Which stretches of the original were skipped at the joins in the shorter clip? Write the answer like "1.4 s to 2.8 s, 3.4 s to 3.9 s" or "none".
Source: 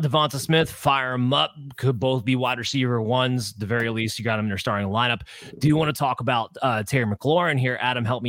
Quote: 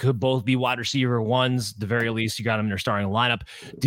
none